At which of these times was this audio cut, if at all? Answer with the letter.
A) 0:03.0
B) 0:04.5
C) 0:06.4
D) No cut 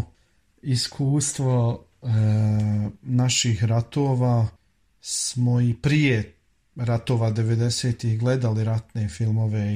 D